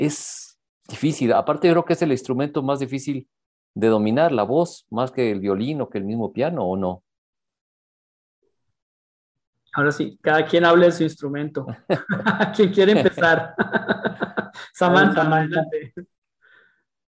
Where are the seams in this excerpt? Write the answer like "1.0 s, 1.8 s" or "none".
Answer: none